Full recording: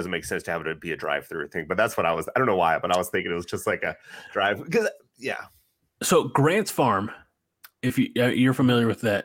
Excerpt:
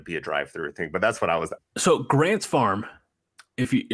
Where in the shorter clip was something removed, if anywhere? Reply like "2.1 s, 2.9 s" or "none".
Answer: 1.6 s